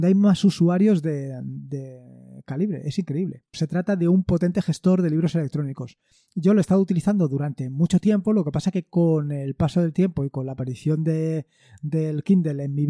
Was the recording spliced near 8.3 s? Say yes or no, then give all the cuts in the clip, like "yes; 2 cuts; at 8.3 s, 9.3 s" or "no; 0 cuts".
no; 1 cut; at 3.5 s